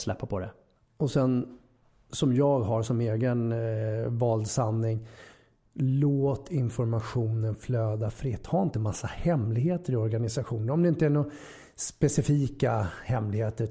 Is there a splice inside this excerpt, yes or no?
no